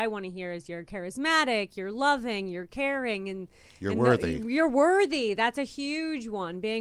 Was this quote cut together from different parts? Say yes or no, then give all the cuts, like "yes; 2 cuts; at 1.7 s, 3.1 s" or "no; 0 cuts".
no; 0 cuts